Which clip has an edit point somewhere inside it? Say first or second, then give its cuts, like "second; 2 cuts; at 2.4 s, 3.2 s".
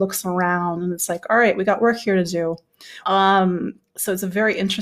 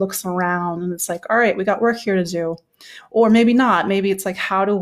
first; 1 cut; at 3.0 s